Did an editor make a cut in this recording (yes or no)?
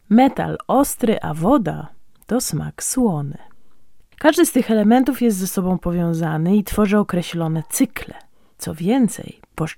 yes